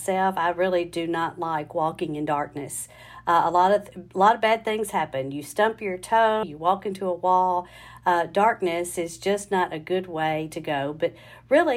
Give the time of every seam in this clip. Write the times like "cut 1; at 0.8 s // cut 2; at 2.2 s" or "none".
cut 1; at 6.4 s